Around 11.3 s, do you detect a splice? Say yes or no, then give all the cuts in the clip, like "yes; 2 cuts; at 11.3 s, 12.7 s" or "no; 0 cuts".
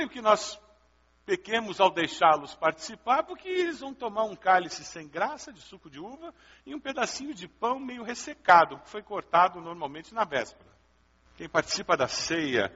yes; 1 cut; at 11.3 s